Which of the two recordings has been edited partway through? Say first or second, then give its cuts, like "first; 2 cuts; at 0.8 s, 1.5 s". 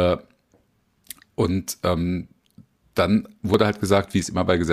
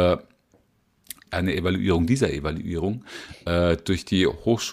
second; 1 cut; at 1.3 s